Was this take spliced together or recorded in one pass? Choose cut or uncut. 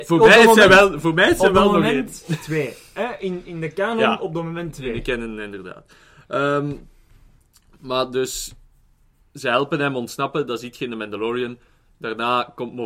uncut